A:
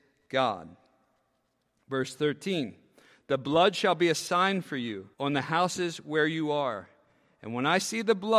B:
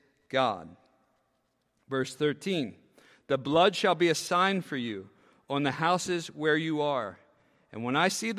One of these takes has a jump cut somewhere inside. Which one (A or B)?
A